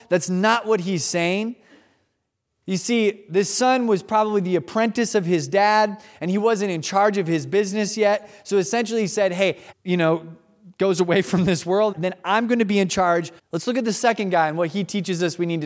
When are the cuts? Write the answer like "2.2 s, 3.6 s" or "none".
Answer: 9.7 s, 11.9 s, 13.4 s